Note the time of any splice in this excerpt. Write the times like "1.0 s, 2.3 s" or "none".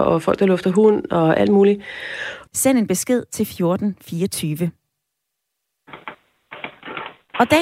2.5 s